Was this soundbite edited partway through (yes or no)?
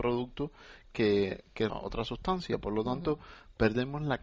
yes